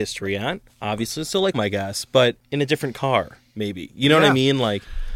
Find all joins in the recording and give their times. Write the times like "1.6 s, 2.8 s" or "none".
1.5 s